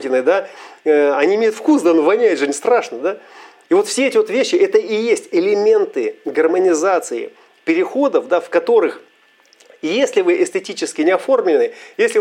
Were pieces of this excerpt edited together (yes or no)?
no